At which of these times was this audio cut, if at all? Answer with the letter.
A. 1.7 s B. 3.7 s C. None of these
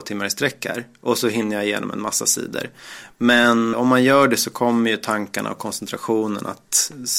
B